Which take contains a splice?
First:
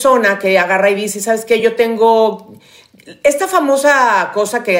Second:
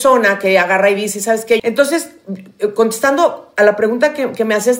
second; 1 cut; at 1.6 s

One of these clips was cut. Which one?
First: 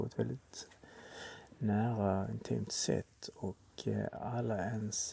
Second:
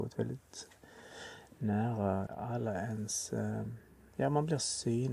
second; 1 cut; at 2.3 s

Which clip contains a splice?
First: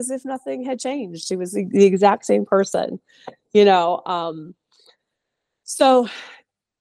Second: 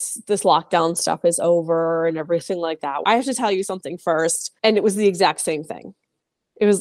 second; 2 cuts; at 3.0 s, 4.6 s

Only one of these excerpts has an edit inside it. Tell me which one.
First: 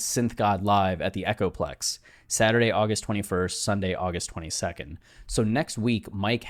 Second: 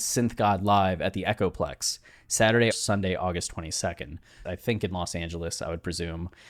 second; 2 cuts; at 2.7 s, 4.4 s

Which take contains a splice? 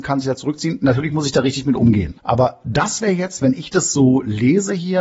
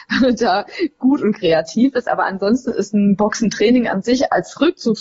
first; 1 cut; at 2.2 s

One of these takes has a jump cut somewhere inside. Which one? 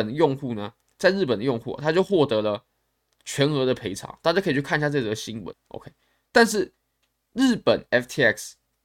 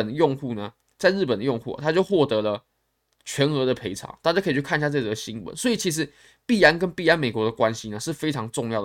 first; 1 cut; at 5.5 s

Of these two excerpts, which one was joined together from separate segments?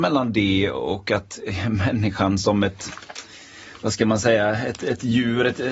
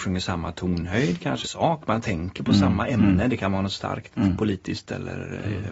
second; 1 cut; at 1.4 s

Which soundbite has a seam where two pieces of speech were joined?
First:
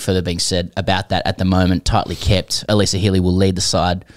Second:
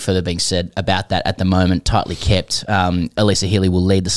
first; 1 cut; at 2.7 s

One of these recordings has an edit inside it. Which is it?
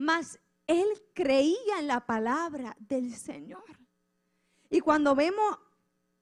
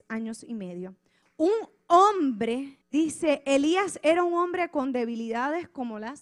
second; 2 cuts; at 1.2 s, 2.8 s

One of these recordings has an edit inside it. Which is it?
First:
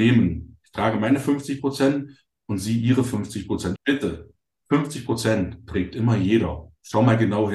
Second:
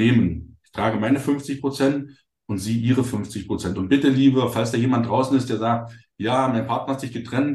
first; 1 cut; at 3.8 s

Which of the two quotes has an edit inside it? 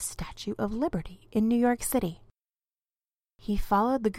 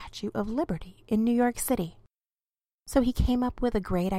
second; 1 cut; at 2.7 s

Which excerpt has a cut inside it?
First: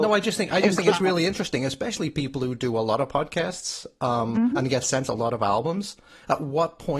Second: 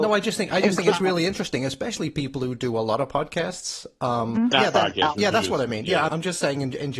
second; 2 cuts; at 4.5 s, 6.1 s

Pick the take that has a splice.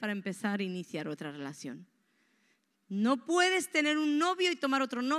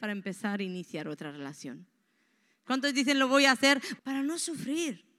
second; 2 cuts; at 2.6 s, 4.0 s

